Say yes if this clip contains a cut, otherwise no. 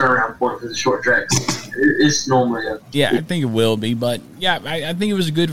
yes